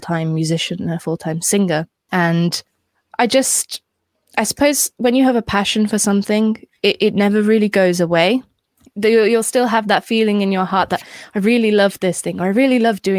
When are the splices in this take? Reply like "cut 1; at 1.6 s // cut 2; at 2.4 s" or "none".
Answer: cut 1; at 8.9 s